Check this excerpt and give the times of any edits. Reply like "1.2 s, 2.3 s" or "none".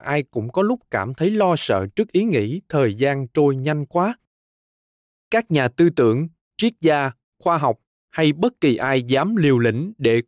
none